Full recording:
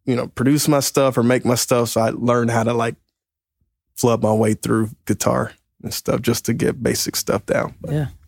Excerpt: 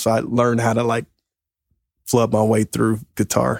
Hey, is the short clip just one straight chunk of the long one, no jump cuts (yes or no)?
yes